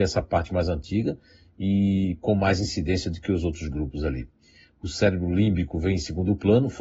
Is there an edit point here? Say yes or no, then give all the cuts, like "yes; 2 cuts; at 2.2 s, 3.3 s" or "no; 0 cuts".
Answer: no; 0 cuts